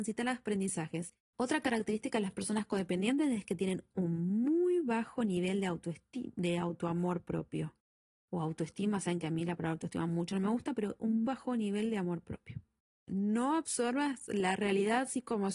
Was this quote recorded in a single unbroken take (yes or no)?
no